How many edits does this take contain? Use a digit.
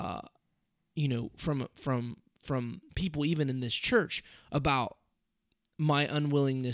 0